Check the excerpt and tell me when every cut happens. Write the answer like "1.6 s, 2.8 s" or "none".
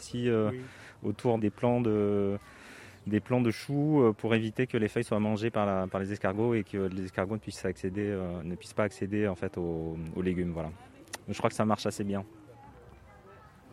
1.4 s

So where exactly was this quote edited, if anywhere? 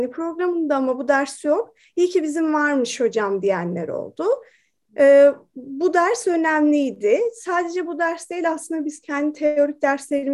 none

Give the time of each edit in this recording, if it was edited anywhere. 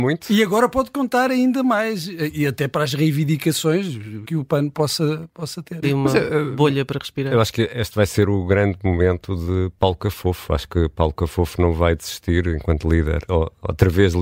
4.2 s, 5.8 s, 13.3 s

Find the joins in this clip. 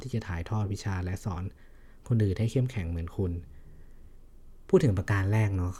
none

